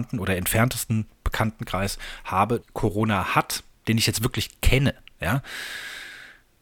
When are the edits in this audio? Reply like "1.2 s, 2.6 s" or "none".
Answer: 2.6 s

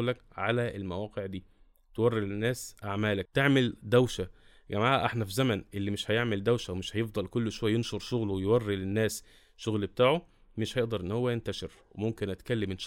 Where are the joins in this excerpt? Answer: none

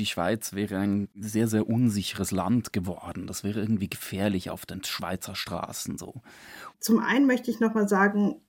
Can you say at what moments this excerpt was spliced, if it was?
6.7 s

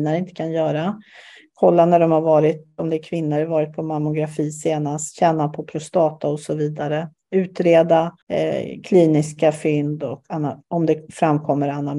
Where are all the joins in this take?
8.2 s, 10.6 s

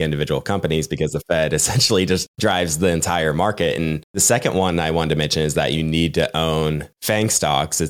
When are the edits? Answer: 6.9 s

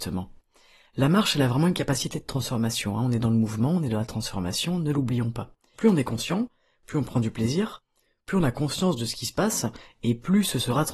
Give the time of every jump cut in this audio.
5.7 s

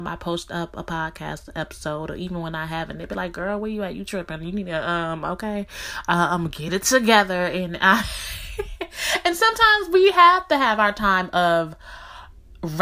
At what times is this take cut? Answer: none

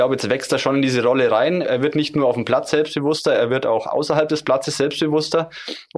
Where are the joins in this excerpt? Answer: none

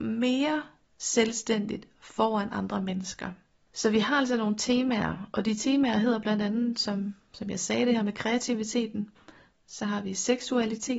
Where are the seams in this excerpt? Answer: 3.7 s

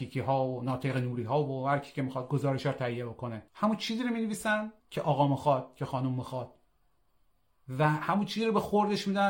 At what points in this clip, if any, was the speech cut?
3.5 s, 4.8 s

